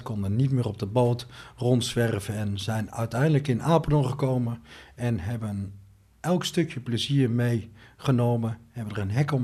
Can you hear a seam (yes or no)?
no